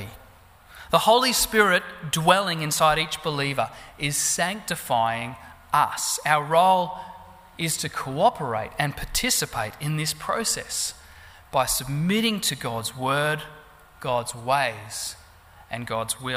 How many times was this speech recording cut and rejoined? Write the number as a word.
zero